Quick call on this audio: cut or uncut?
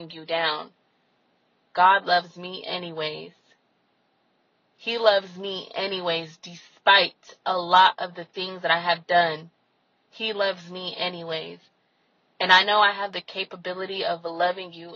cut